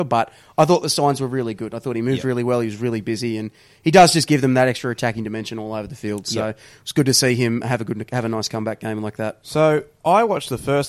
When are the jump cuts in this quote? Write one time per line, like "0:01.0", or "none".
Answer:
none